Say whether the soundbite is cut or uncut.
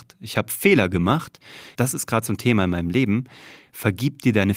cut